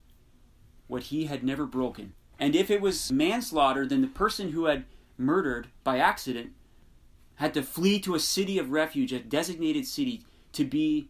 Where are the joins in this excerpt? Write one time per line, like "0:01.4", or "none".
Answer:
0:02.3

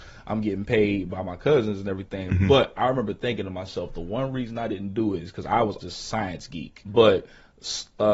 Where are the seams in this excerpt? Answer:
0:05.8
0:06.8

